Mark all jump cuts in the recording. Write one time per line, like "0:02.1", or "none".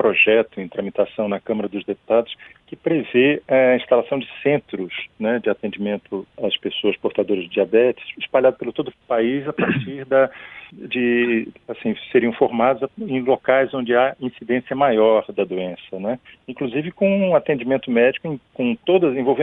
none

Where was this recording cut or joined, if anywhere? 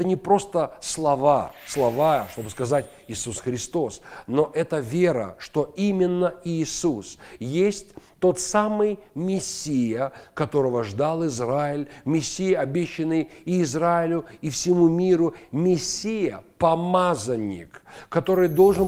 none

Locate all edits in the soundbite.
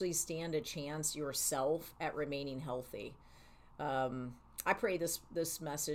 none

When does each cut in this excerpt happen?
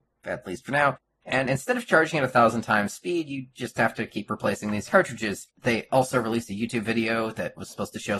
none

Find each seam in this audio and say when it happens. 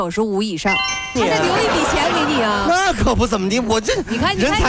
0:01.2

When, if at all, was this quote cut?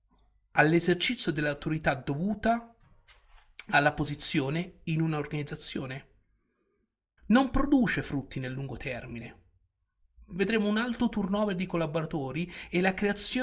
0:07.2

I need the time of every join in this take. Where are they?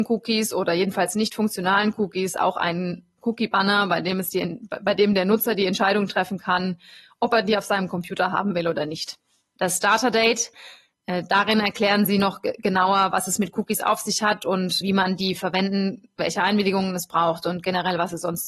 0:09.6
0:14.8
0:16.2

